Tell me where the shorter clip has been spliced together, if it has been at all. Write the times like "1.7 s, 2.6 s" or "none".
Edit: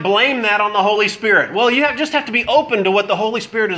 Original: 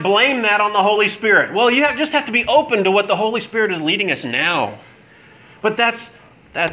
none